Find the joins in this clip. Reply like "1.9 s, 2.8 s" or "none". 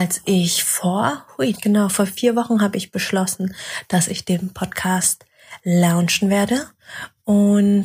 1.5 s